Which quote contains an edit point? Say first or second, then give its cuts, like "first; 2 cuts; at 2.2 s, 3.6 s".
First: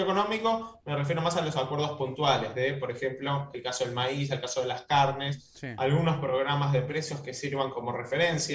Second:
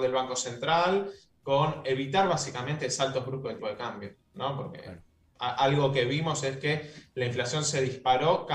second; 1 cut; at 3.6 s